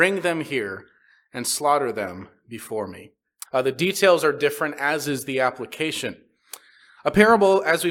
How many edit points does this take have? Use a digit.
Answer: 1